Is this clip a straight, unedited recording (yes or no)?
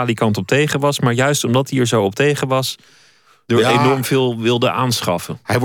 yes